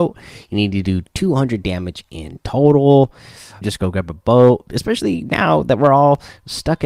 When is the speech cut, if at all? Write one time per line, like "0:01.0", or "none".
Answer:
0:03.6
0:04.7